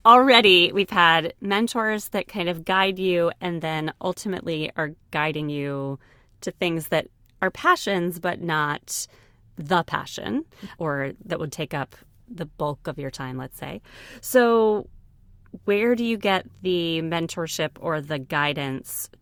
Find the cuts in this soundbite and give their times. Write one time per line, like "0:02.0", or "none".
none

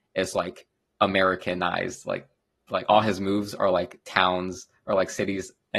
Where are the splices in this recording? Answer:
none

